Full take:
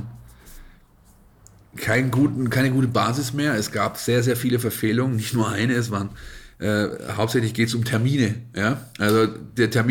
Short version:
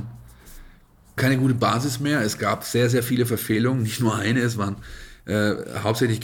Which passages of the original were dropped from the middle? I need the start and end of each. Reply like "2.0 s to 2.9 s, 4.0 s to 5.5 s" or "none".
1.2 s to 2.5 s